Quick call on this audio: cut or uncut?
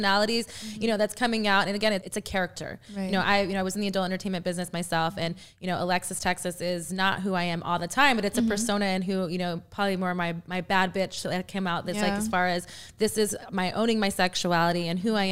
cut